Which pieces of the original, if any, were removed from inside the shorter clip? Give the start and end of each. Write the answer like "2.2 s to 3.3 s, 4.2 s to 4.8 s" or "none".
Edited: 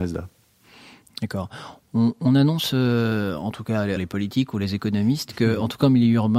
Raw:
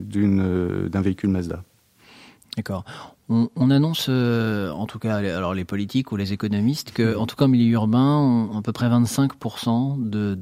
5.3 s to 5.5 s